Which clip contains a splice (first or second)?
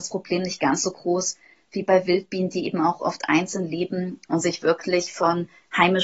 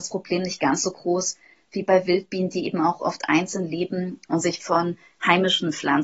second